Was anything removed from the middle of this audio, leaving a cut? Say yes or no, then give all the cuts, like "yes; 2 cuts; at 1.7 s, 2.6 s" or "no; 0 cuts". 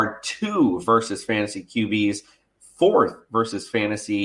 yes; 1 cut; at 2.5 s